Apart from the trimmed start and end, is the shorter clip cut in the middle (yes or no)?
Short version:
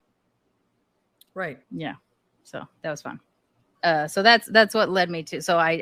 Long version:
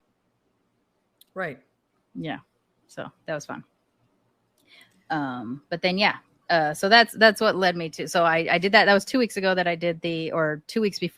yes